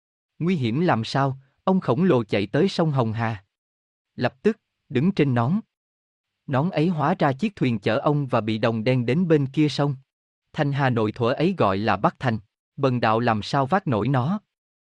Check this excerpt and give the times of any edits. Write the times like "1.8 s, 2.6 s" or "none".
4.8 s, 10.4 s, 12.7 s